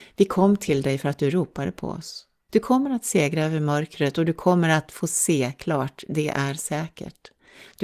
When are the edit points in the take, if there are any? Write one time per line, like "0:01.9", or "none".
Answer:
0:02.5